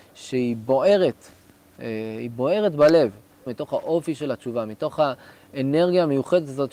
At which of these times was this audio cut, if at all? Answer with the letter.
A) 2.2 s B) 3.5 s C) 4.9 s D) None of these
B